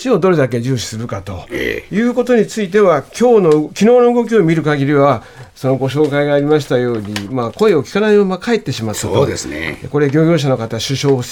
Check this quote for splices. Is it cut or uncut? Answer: uncut